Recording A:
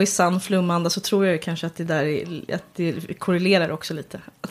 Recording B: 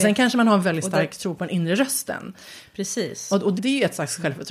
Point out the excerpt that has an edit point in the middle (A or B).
B